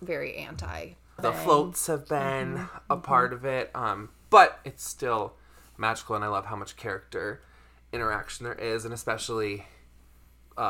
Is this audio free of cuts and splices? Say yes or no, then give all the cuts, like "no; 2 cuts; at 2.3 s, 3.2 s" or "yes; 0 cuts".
no; 1 cut; at 1.2 s